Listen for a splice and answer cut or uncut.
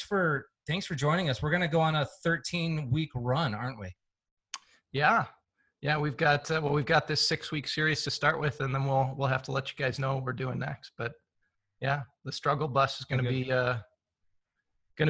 uncut